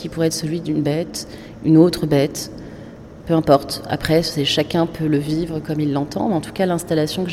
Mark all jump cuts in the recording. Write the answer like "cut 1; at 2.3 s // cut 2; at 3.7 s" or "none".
none